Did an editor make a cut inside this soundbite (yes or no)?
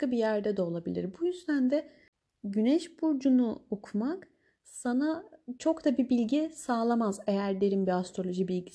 no